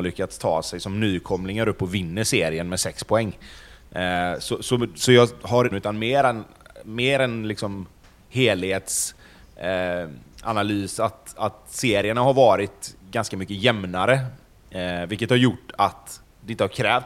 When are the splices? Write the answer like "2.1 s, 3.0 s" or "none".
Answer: 5.7 s